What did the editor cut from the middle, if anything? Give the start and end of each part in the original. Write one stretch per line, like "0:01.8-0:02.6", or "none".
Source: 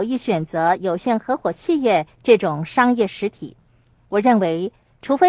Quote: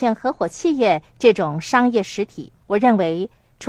0:03.7-0:04.0

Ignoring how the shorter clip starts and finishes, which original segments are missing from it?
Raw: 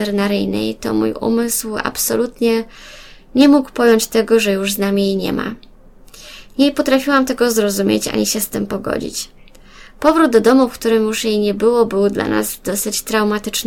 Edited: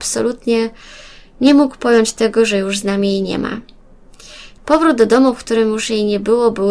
0:06.5-0:09.9

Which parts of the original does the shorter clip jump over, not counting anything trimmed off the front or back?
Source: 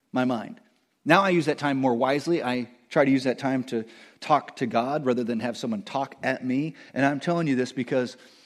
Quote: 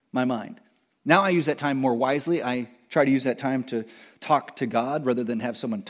none

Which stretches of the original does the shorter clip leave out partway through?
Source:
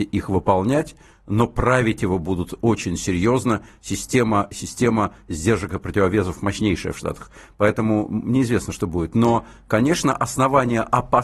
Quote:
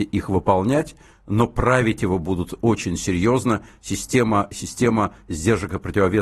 none

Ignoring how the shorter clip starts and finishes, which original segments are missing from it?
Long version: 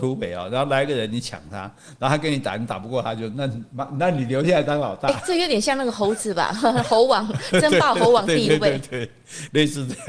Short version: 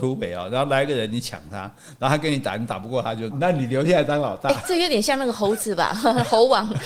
0:03.3-0:03.9

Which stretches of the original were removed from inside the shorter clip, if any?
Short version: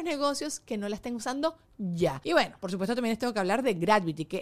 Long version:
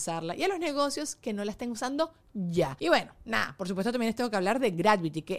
0:03.1-0:03.6

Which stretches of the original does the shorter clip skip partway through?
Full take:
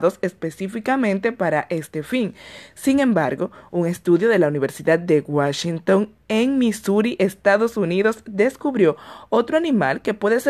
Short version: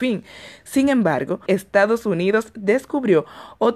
0:03.6-0:07.2

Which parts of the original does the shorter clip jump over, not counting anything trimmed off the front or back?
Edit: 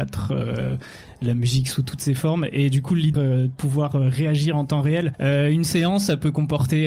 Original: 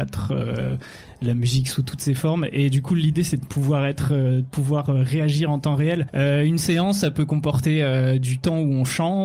0:03.1-0:04.1

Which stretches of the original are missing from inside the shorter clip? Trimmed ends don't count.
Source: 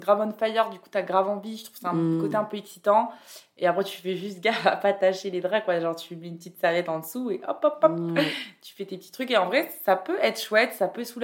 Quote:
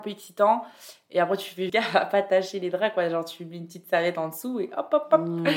0:04.2-0:04.4

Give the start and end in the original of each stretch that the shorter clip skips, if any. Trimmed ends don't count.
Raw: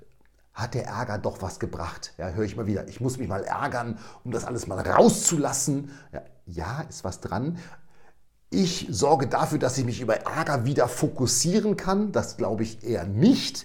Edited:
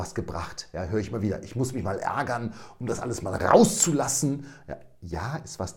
none

